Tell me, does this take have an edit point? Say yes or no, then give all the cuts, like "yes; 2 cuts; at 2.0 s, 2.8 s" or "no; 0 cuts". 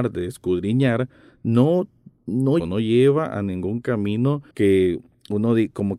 yes; 2 cuts; at 2.6 s, 4.5 s